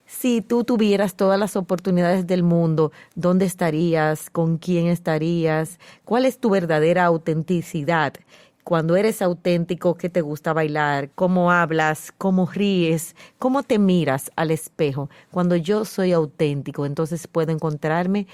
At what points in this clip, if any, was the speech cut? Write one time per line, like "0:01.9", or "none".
0:11.1